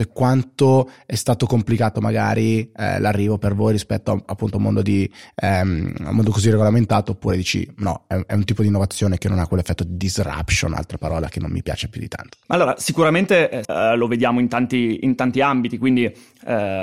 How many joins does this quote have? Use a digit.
2